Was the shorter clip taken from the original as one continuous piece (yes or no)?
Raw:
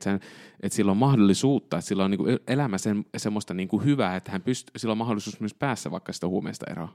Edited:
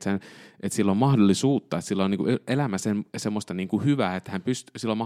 yes